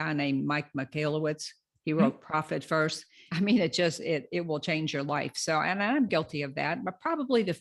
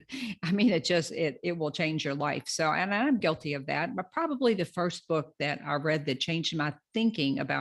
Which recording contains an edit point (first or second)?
first